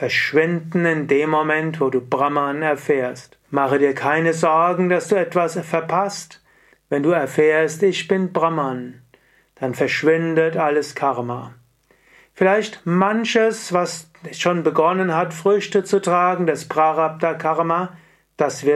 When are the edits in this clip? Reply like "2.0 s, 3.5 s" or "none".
3.4 s, 6.7 s